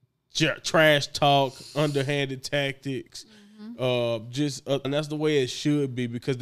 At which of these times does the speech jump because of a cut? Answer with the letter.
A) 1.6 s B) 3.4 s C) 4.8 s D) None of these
C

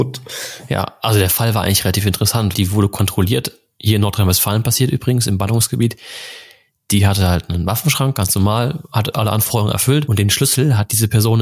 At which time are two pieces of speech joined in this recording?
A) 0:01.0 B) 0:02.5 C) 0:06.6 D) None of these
B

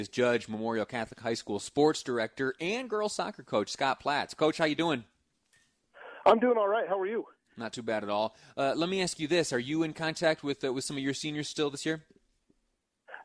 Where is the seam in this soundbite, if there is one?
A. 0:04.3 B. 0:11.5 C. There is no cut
C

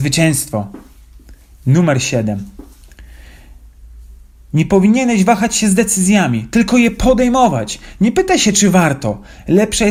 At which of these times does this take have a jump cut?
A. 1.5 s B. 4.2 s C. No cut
C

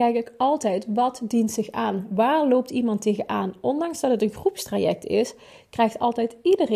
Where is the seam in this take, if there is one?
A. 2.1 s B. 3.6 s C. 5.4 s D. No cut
D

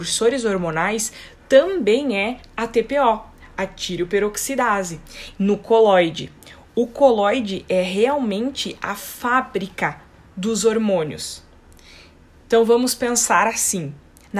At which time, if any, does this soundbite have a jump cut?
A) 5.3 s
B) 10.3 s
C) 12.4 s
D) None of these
A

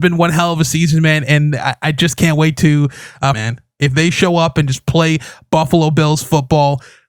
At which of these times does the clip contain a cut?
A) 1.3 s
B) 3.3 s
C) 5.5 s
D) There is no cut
B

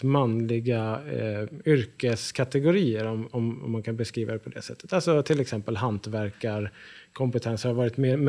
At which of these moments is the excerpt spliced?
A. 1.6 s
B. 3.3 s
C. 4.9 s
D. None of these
D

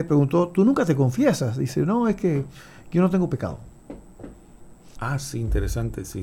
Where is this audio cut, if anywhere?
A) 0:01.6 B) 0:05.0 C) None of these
B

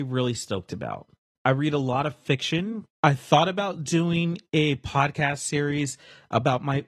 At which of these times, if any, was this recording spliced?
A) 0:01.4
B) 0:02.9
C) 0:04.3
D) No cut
A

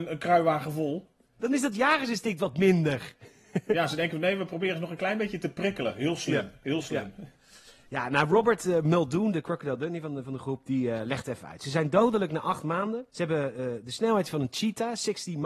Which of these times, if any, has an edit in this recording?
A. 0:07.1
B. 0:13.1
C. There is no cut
B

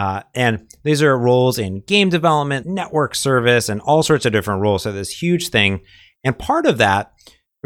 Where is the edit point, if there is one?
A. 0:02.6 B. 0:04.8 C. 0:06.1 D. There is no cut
A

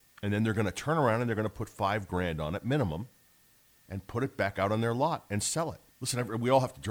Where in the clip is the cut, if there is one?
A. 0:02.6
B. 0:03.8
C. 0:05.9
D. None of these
C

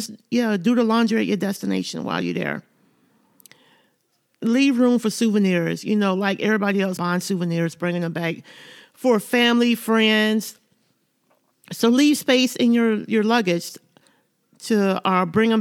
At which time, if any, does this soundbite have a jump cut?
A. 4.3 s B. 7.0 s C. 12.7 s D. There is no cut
B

